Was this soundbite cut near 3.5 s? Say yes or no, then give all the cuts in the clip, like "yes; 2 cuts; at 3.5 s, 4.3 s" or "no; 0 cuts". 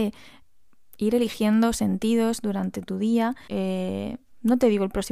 yes; 1 cut; at 3.5 s